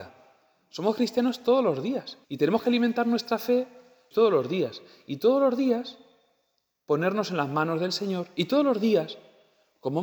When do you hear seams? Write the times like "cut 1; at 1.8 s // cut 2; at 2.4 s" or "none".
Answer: cut 1; at 2.2 s // cut 2; at 4.1 s